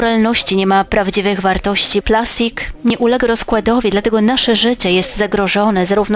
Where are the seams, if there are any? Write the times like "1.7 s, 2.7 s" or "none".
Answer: 2.0 s